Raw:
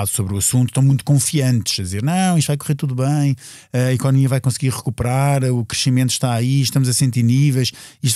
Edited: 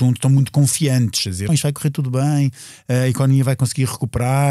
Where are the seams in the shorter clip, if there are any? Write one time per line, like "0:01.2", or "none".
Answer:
0:01.5